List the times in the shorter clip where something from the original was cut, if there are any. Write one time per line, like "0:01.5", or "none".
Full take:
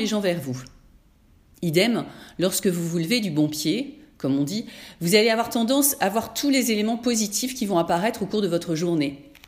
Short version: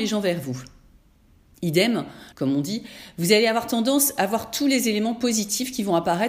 0:02.3